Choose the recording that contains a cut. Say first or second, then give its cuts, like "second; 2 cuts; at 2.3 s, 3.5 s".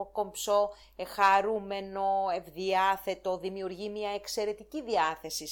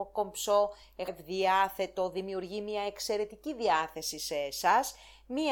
second; 1 cut; at 1.1 s